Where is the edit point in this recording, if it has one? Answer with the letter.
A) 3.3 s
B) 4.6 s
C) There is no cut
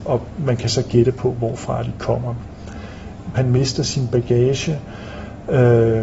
A